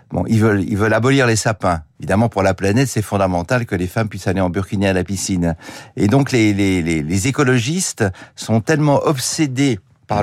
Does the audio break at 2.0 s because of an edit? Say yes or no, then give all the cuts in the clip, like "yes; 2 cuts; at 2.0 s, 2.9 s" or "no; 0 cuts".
yes; 1 cut; at 2.0 s